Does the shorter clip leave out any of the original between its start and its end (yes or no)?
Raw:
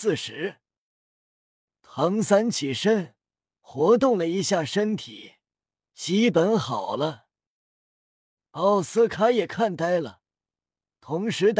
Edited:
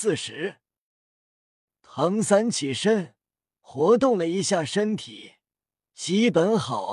no